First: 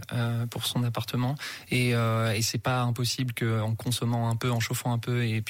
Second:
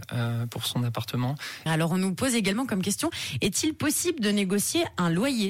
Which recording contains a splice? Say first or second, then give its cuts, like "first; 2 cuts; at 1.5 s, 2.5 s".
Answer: second; 1 cut; at 1.7 s